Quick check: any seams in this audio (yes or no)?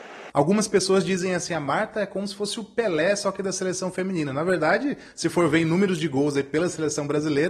no